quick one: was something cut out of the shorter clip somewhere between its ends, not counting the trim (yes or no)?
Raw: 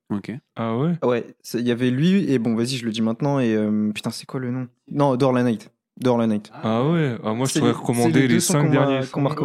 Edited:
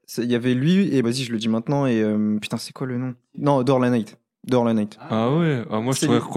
yes